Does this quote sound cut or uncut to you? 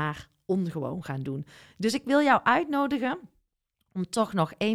uncut